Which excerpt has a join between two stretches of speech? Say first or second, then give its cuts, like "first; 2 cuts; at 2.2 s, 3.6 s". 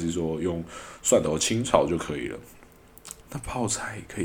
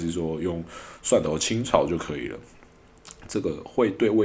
first; 1 cut; at 3.2 s